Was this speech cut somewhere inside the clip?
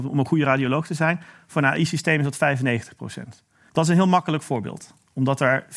yes; 1 cut; at 3.7 s

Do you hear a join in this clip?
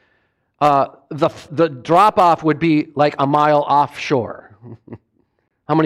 yes; 1 cut; at 1.5 s

